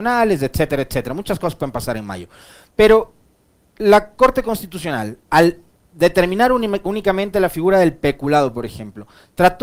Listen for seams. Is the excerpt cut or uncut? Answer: uncut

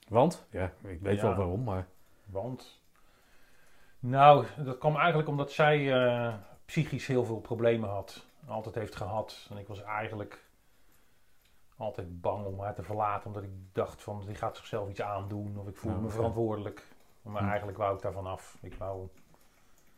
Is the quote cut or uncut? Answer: uncut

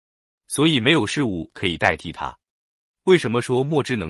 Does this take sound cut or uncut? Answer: uncut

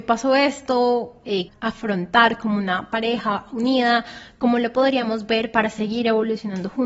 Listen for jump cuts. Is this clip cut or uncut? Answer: cut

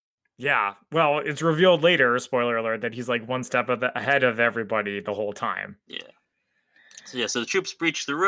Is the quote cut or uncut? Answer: uncut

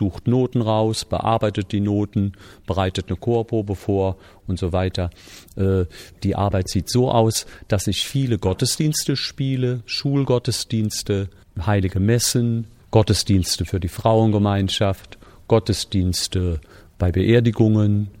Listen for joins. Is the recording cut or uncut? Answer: uncut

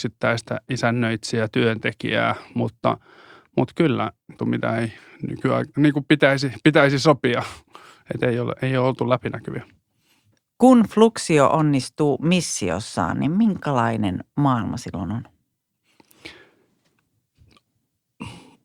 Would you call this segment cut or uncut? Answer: cut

